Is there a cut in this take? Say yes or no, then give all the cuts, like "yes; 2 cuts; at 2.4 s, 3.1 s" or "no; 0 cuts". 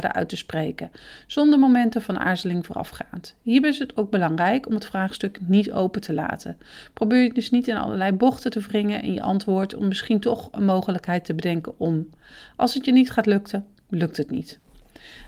no; 0 cuts